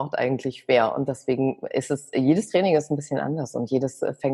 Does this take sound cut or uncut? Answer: uncut